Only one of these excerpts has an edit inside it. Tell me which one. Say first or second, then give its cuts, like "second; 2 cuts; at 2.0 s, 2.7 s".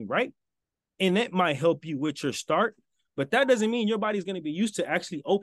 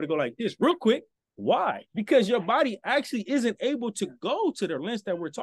second; 1 cut; at 1.2 s